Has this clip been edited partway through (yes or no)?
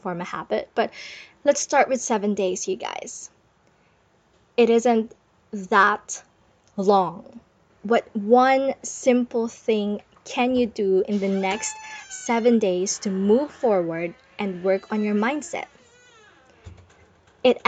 yes